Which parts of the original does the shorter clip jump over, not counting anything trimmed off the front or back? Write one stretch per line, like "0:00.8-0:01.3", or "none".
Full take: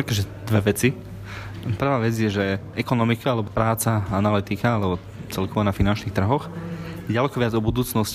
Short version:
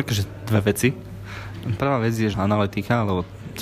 0:02.3-0:04.1